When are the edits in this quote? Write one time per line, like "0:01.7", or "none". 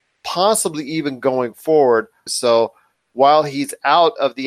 0:02.3